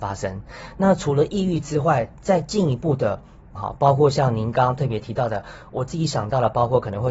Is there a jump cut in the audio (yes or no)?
yes